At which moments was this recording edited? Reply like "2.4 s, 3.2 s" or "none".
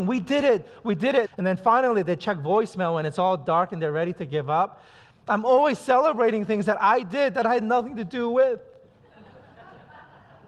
1.3 s, 5.1 s